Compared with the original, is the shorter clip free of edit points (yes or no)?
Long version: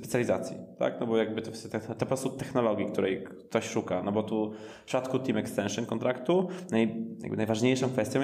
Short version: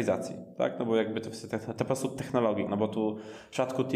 no